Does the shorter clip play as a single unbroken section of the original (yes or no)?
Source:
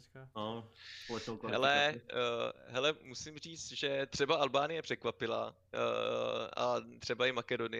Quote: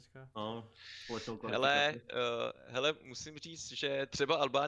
yes